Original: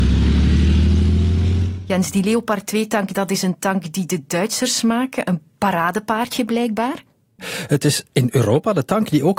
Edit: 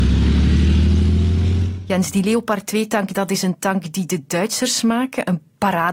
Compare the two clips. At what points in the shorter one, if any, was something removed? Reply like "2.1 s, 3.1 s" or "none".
none